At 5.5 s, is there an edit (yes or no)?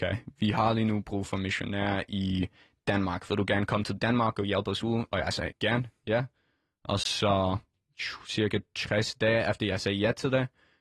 yes